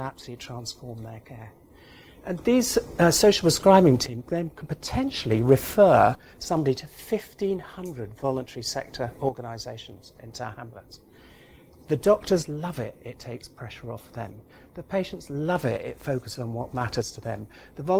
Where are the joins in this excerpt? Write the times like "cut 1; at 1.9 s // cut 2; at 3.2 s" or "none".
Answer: none